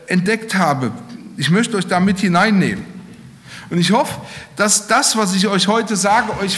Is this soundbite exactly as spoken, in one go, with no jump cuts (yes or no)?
yes